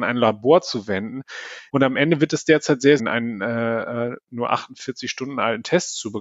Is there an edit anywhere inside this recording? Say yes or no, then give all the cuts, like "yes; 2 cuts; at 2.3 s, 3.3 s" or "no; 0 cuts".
yes; 2 cuts; at 1.7 s, 3.0 s